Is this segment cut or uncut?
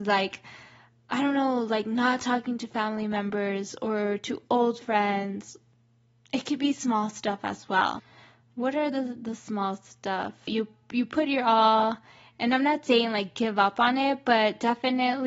cut